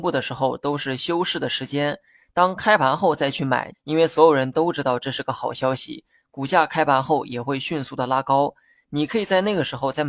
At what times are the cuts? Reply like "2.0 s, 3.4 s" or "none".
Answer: 3.7 s